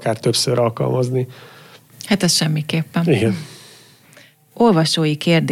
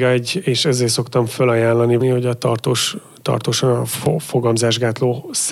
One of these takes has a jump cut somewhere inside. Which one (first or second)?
second